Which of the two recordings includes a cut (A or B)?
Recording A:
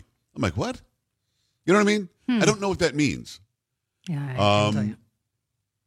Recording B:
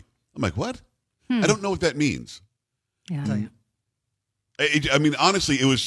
B